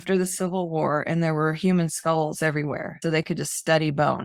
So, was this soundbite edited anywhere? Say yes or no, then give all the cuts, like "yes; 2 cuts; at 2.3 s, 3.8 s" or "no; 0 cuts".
yes; 1 cut; at 3.0 s